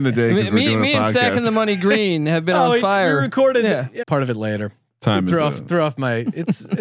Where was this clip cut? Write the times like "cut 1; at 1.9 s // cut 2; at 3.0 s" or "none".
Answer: cut 1; at 4.0 s